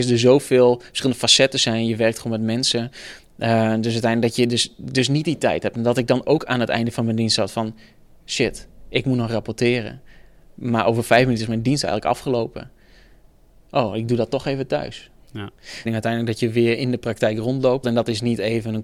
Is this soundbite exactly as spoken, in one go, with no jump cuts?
no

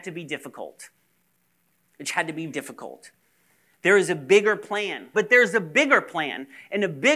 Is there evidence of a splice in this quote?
yes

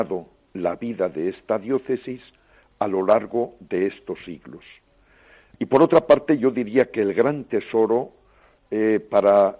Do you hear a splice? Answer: yes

